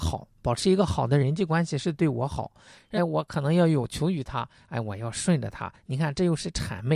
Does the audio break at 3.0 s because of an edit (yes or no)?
yes